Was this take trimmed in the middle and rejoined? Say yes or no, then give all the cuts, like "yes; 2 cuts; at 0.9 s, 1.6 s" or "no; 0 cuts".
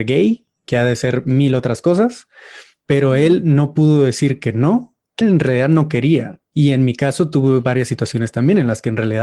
yes; 1 cut; at 5.2 s